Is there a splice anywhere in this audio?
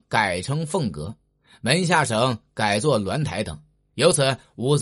no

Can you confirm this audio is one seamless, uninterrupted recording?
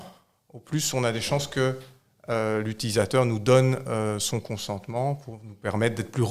yes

